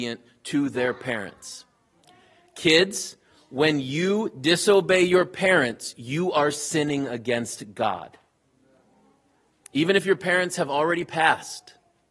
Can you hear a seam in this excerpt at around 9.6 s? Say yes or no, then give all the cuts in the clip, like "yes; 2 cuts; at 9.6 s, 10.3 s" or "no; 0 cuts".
yes; 1 cut; at 9.6 s